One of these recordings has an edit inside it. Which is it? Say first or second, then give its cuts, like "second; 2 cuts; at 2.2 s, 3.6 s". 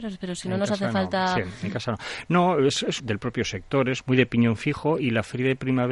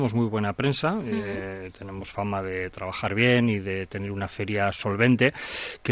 first; 2 cuts; at 3.0 s, 4.0 s